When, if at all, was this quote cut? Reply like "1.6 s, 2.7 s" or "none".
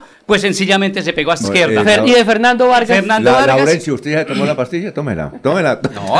1.4 s